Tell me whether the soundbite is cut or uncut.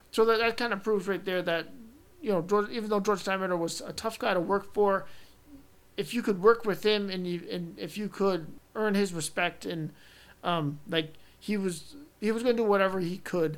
uncut